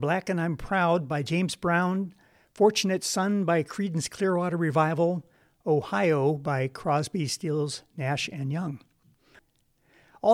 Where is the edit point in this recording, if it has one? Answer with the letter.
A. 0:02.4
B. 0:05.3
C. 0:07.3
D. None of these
D